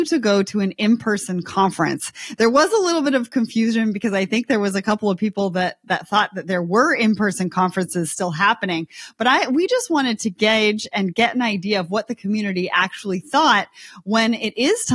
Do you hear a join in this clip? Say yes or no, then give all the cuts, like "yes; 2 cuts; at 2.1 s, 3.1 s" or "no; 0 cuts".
no; 0 cuts